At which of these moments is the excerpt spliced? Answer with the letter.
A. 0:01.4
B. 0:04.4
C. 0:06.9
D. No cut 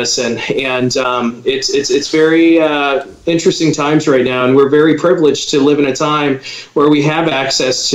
D